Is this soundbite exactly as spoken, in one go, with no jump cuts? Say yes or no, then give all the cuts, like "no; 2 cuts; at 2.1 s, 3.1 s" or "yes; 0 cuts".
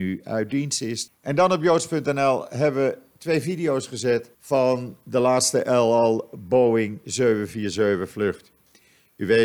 no; 2 cuts; at 1.1 s, 4.3 s